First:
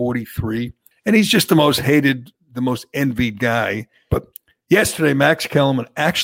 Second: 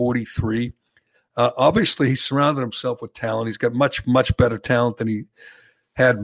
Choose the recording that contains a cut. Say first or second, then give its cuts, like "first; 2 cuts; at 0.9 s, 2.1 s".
first; 2 cuts; at 0.9 s, 4.1 s